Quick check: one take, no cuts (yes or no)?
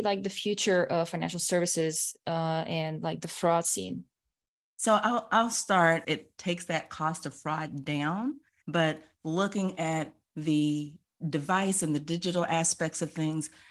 no